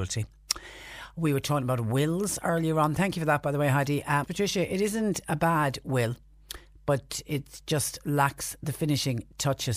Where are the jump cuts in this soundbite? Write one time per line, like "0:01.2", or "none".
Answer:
0:04.2